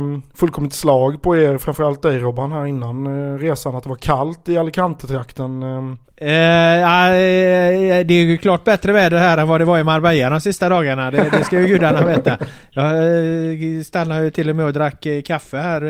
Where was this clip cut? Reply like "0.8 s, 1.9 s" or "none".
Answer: 6.0 s